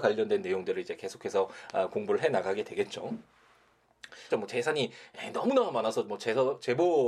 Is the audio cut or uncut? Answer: cut